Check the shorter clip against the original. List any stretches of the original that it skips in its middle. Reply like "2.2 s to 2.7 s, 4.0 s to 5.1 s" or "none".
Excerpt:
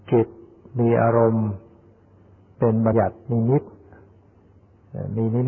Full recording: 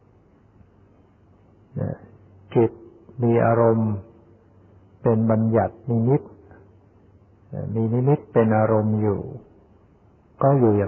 5.4 s to 5.5 s